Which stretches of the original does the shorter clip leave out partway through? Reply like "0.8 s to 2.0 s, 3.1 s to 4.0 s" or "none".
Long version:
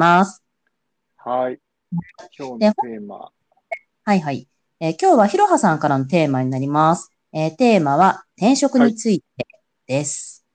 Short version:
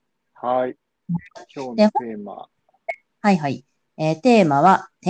4.7 s to 7.2 s